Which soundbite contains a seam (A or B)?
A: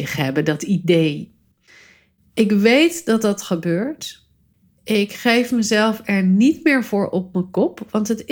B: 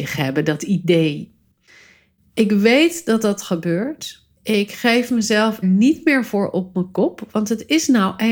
B